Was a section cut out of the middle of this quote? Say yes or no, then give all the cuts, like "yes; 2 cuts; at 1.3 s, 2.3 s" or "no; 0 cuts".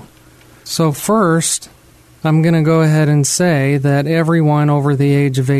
no; 0 cuts